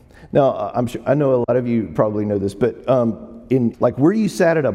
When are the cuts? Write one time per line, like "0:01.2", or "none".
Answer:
0:03.7